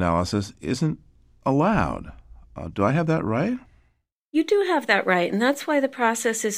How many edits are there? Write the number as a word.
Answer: zero